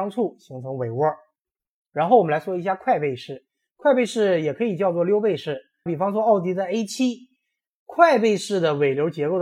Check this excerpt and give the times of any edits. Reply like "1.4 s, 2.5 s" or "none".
5.9 s